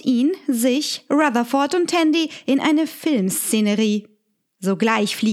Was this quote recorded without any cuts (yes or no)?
yes